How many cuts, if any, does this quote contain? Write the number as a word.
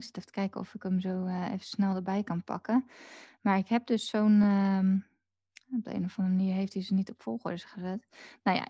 zero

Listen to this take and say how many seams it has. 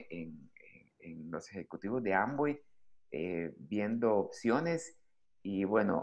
zero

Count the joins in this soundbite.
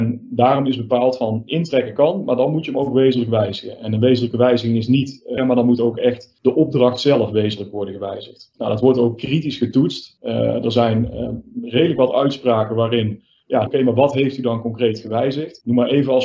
two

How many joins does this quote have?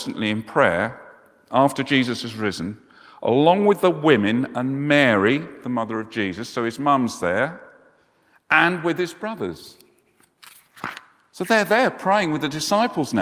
zero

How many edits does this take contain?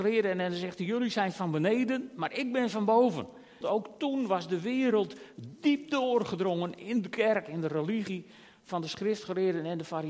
one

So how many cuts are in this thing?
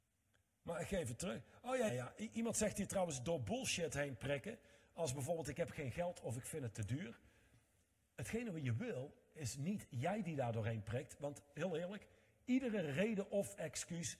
one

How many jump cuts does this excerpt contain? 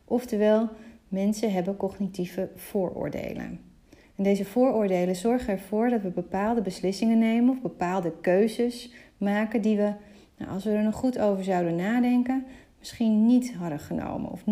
one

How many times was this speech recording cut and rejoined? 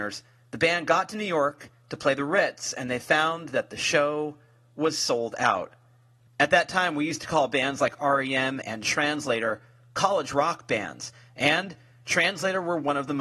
one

